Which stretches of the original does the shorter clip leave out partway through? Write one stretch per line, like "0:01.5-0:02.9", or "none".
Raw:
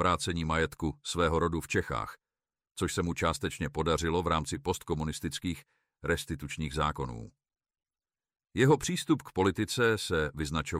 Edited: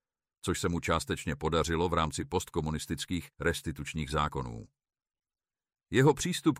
0:05.7-0:06.0

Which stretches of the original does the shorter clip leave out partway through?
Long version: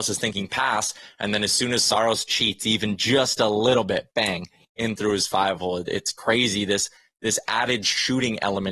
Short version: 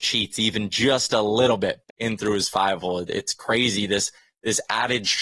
0:04.1-0:04.6

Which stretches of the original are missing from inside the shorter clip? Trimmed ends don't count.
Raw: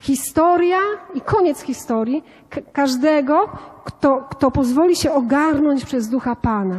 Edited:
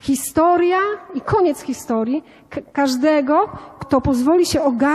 0:03.8-0:04.3

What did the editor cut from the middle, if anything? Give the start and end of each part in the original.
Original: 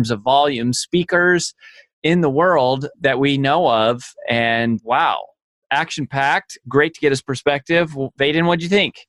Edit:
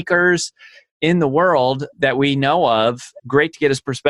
0:04.2-0:06.6

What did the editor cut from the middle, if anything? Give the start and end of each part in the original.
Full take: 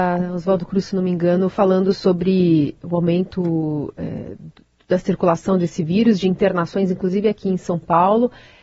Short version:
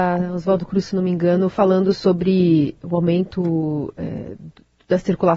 none

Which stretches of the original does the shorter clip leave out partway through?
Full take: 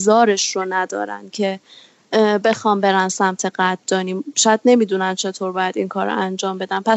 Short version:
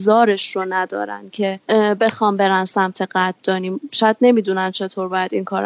0:01.6-0:02.1

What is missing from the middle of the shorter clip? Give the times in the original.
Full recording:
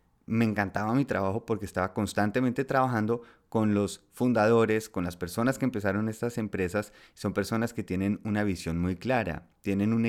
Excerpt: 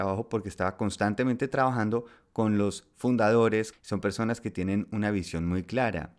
0:04.9-0:07.1

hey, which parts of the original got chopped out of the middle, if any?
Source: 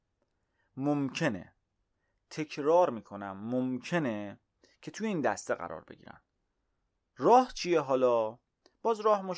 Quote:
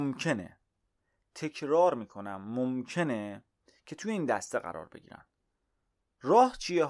none

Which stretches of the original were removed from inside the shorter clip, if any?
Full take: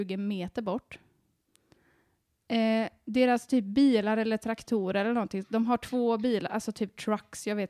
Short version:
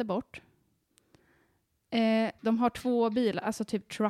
0:03.0-0:05.5

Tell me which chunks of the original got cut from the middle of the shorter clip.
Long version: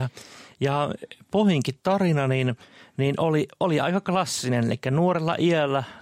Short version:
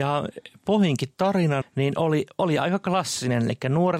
0:02.3-0:02.8

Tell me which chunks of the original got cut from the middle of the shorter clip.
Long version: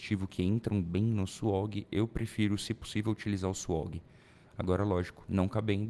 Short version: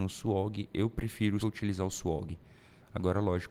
0:02.6-0:03.0

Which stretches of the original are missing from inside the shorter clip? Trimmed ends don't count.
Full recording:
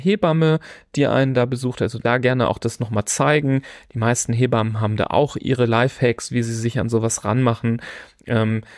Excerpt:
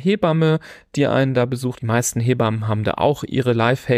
0:01.7-0:03.9

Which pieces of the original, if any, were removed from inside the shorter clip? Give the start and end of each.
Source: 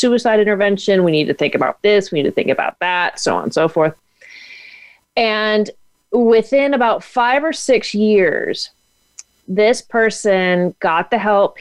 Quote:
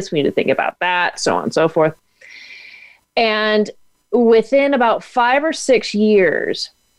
none

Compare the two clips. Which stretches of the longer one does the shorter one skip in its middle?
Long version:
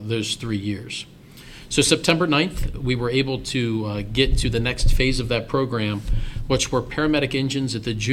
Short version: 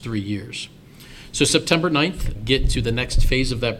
0:02.7-0:04.0

